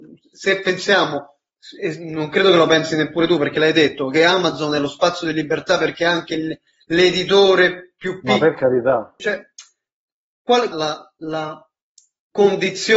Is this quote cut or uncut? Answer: cut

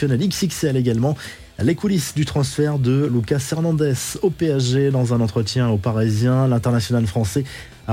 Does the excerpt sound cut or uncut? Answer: uncut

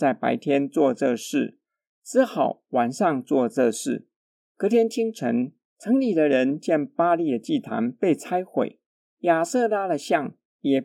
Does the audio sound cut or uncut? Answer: uncut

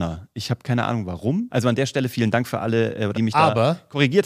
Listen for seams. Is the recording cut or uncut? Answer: cut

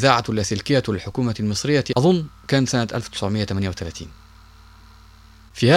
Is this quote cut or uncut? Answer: uncut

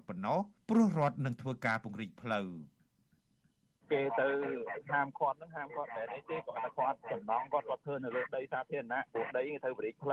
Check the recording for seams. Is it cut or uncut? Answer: uncut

